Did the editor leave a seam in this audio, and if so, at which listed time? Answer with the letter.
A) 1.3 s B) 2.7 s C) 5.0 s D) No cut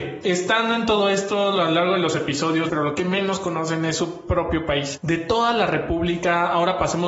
B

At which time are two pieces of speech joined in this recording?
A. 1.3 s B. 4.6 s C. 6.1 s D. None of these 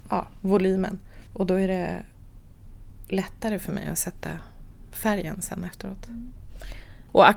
A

